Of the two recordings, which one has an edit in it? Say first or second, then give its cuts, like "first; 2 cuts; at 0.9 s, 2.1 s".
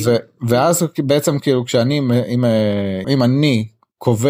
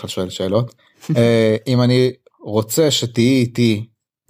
first; 1 cut; at 3.0 s